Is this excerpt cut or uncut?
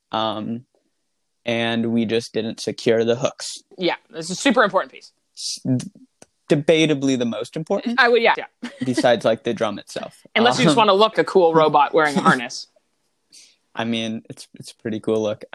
cut